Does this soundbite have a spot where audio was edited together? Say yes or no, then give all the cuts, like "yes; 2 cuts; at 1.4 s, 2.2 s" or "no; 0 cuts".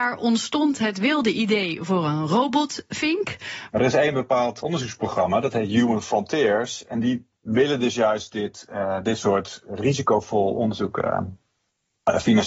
yes; 1 cut; at 3.7 s